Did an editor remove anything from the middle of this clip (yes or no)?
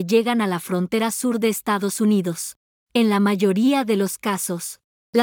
yes